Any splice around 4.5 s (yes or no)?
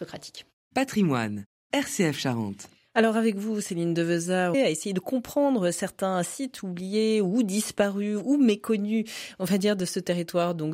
yes